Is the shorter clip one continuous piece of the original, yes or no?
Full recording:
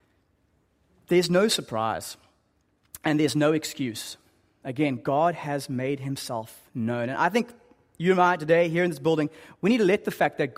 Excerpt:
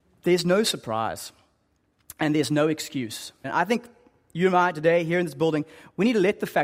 no